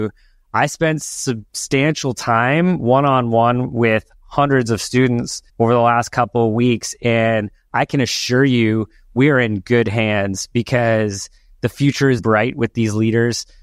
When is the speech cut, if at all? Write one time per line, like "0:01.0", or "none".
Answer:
0:05.5
0:12.2